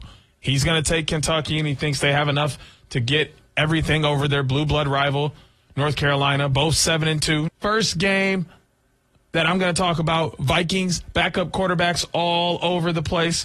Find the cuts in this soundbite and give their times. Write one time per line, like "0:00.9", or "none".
0:07.5
0:11.1